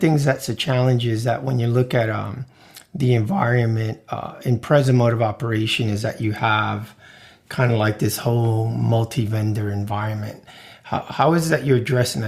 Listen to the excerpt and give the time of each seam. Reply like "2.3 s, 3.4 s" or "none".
none